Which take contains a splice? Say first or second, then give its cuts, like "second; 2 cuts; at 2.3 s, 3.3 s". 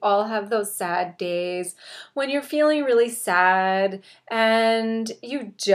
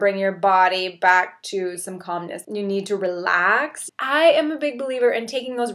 second; 2 cuts; at 2.4 s, 3.9 s